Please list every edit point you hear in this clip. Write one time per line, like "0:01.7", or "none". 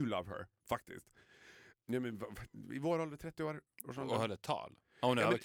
0:01.8